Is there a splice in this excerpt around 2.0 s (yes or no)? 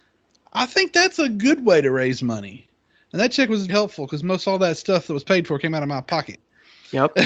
no